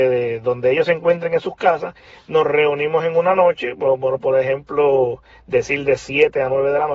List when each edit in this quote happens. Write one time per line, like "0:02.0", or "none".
none